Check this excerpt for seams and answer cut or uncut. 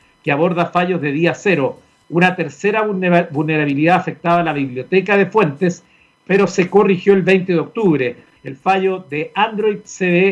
cut